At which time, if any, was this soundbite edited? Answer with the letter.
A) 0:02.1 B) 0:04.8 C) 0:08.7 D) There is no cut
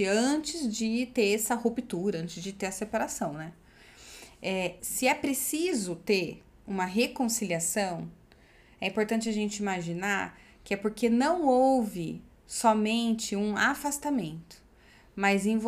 B